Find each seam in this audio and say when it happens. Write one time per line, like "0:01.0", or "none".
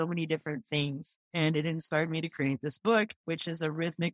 none

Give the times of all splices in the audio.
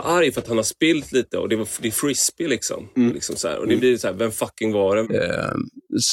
0:03.1
0:05.0

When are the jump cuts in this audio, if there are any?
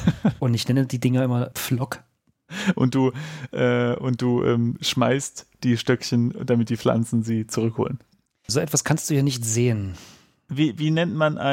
0:01.5
0:08.5

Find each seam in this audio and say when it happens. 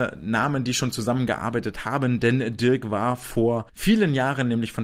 0:03.7

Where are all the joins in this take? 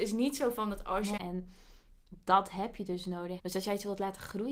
0:01.2
0:03.4

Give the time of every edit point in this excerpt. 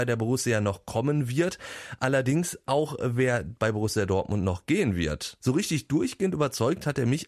0:05.4

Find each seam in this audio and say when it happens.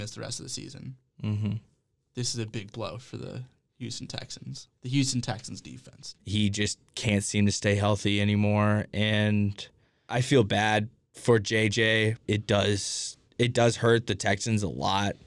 0:04.8
0:06.2
0:12.3

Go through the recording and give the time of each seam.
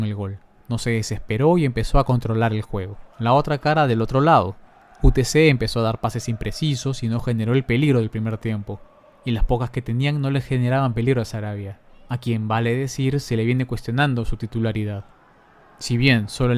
0:03.1

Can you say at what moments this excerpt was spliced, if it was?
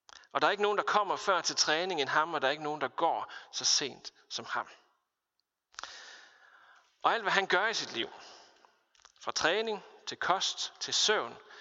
none

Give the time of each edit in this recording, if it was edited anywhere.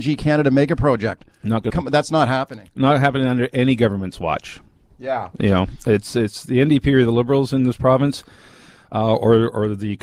0:01.7

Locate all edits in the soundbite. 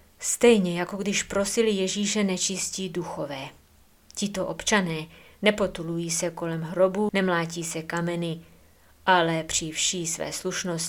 0:07.1

